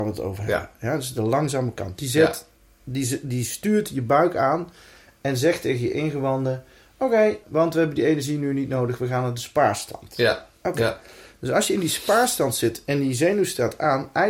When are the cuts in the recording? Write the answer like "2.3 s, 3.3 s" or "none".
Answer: 7.4 s